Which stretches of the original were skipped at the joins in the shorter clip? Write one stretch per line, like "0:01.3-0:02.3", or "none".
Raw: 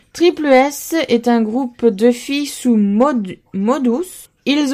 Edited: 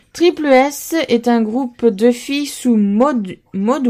none

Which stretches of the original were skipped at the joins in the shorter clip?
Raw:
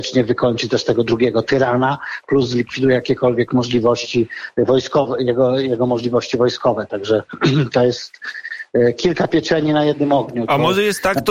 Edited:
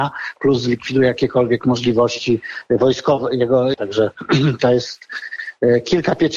0:05.6-0:06.9

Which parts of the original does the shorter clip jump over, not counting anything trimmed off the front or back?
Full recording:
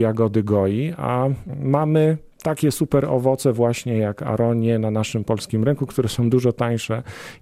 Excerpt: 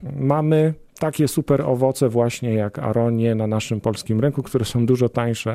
none

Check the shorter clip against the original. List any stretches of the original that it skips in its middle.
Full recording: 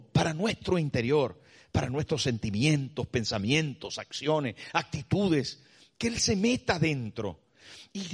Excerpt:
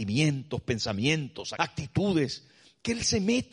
0:04.0-0:04.7

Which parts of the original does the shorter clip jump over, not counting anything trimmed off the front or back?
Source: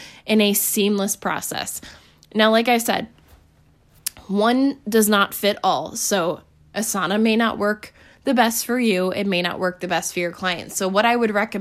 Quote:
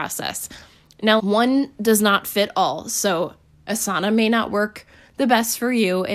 0:02.5-0:04.3

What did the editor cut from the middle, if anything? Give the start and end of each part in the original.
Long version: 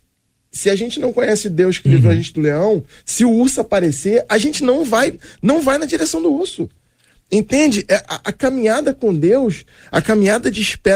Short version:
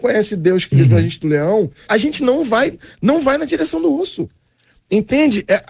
0:03.0-0:04.3

